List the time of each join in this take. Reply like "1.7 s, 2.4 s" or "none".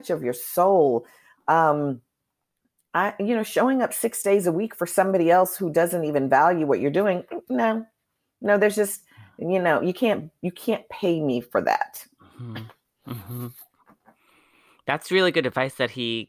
none